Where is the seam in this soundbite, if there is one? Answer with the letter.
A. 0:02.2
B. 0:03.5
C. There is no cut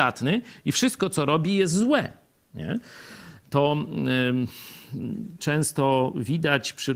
C